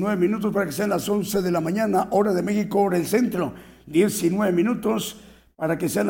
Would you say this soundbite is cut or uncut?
uncut